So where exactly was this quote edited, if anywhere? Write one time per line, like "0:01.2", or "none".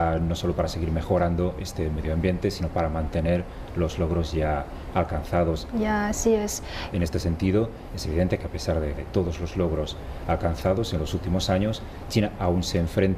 0:05.7
0:06.9
0:08.9

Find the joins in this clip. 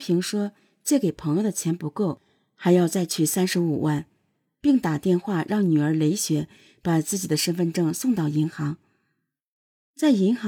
none

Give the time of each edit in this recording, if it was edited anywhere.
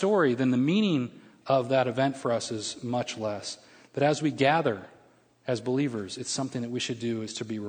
none

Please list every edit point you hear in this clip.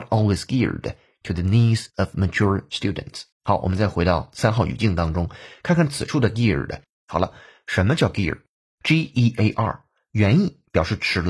0:03.3
0:06.9

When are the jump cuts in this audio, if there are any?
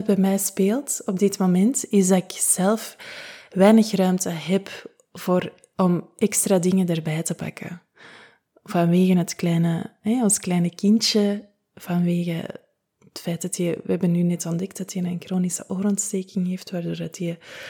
none

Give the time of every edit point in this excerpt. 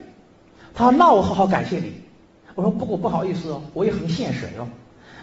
none

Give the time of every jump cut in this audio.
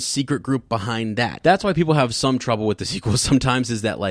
0:01.4

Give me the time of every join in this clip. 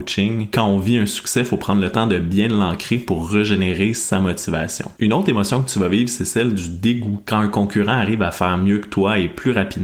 none

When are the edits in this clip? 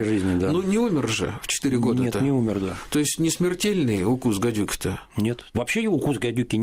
none

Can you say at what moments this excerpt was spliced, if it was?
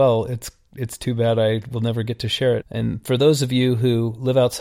0:02.6

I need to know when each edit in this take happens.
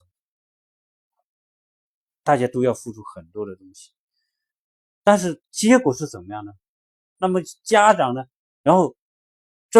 0:07.2
0:08.4

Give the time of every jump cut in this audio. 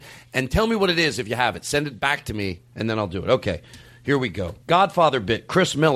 0:04.6

